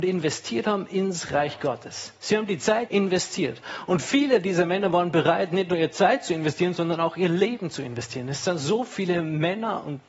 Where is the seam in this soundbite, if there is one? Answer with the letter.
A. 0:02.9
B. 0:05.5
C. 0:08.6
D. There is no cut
A